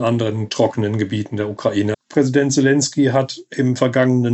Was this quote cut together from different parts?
yes; 1 cut; at 1.9 s

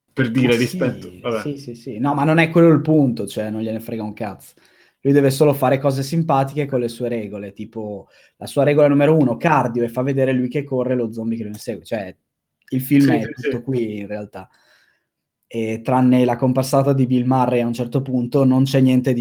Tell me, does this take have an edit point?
no; 0 cuts

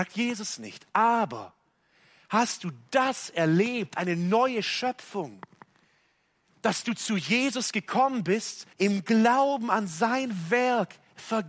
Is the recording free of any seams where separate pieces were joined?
no; 1 cut; at 8.7 s

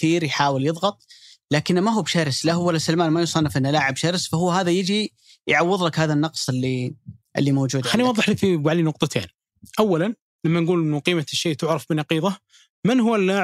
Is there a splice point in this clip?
no; 0 cuts

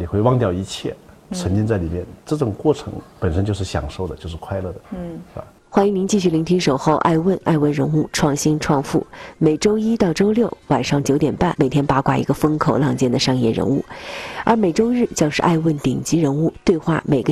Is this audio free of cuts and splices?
no; 2 cuts; at 3.1 s, 11.5 s

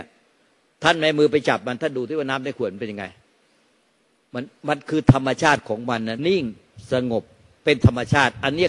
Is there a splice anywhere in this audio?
yes; 1 cut; at 6.2 s

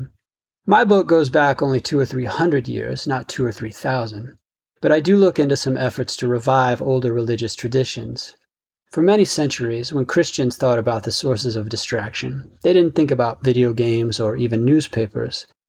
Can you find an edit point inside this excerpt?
no; 0 cuts

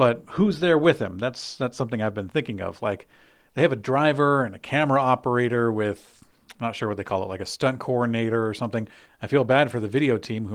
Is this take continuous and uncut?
no; 1 cut; at 9.0 s

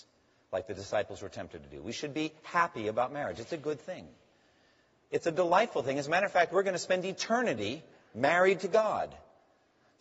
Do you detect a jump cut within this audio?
no; 0 cuts

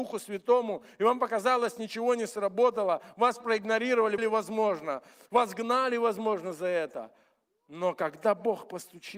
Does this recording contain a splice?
yes; 1 cut; at 4.2 s

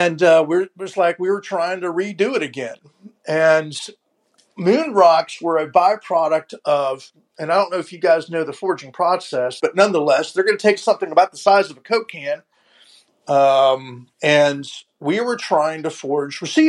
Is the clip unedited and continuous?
no; 3 cuts; at 9.6 s, 13.1 s, 14.1 s

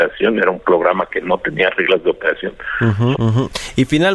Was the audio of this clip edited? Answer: yes; 1 cut; at 3.1 s

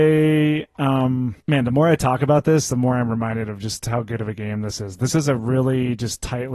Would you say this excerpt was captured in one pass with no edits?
no; 1 cut; at 1.4 s

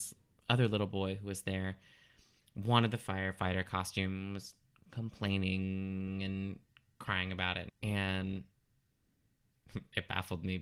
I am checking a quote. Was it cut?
yes; 1 cut; at 7.7 s

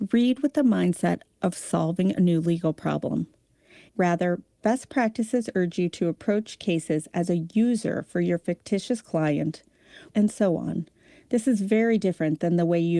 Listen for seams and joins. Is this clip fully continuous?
no; 2 cuts; at 3.9 s, 10.1 s

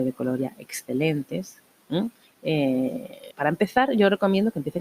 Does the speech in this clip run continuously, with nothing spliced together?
no; 2 cuts; at 2.3 s, 3.3 s

